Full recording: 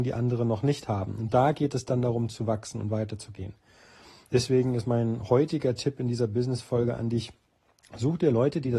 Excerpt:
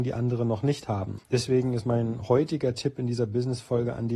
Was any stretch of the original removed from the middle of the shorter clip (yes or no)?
yes